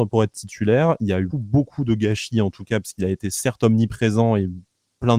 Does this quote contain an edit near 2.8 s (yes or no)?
no